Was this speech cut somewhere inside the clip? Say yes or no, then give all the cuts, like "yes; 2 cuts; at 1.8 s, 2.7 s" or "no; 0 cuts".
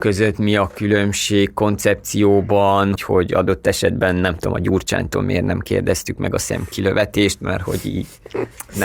yes; 1 cut; at 3.0 s